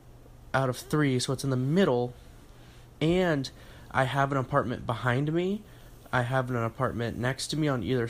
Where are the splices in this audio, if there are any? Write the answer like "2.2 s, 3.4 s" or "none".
none